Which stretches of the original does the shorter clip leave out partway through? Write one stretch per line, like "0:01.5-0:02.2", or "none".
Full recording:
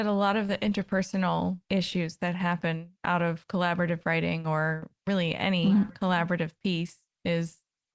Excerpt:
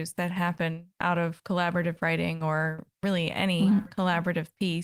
none